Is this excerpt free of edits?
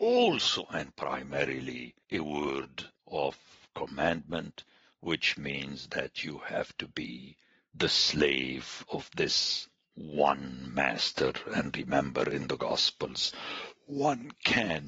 yes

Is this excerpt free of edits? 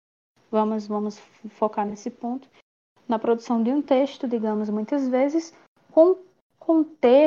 yes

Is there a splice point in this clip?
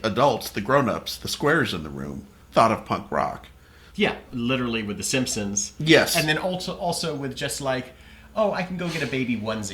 yes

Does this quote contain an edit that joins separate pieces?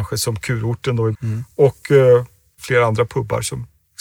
yes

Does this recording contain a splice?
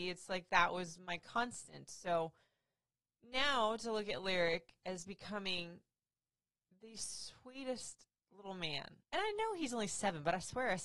yes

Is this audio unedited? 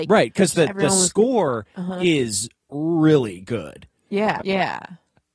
no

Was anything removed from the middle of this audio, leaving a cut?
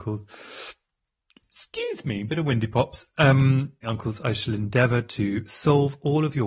yes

